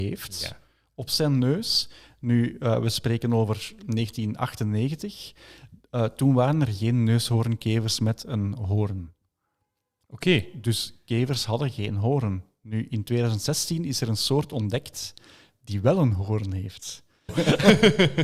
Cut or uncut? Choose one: cut